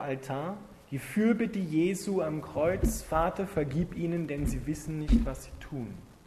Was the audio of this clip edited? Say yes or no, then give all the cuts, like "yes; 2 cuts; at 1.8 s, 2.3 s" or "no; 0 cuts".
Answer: no; 0 cuts